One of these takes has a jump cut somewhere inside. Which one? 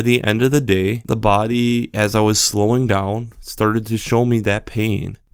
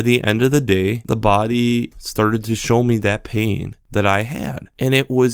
second; 1 cut; at 1.9 s

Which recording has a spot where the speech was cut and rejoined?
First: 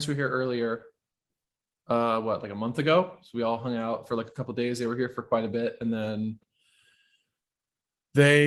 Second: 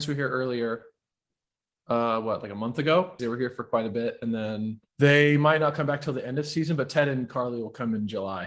second; 2 cuts; at 3.2 s, 4.9 s

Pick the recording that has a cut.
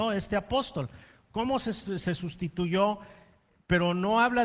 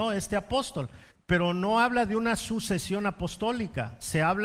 second; 1 cut; at 1.1 s

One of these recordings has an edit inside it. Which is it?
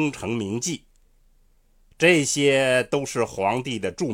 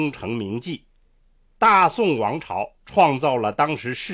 second; 2 cuts; at 1.6 s, 2.8 s

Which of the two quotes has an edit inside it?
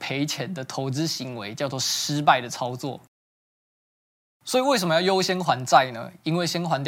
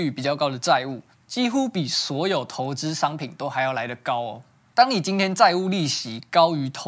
second; 1 cut; at 1.2 s

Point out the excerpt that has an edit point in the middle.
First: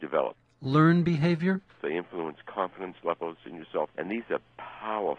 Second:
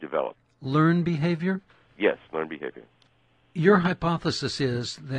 first; 2 cuts; at 1.8 s, 3.9 s

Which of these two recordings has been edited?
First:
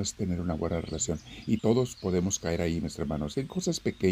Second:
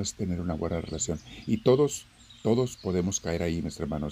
first; 1 cut; at 1.6 s

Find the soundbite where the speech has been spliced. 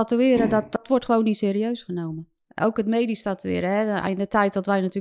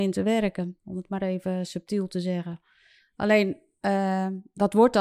second; 1 cut; at 3.0 s

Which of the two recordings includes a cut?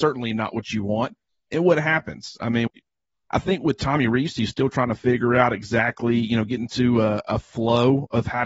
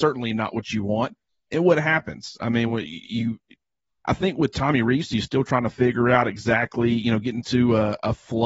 first; 1 cut; at 2.7 s

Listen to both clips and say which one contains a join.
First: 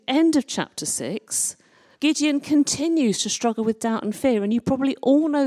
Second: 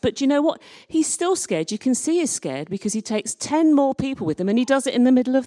first; 1 cut; at 1.9 s

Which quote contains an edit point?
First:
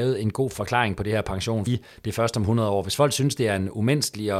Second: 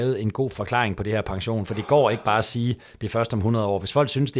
first; 1 cut; at 1.7 s

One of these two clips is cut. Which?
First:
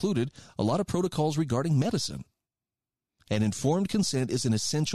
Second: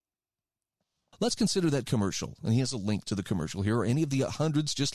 second; 1 cut; at 1.1 s

